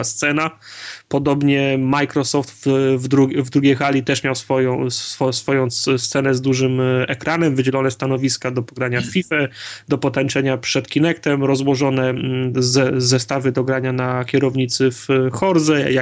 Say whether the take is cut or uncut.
uncut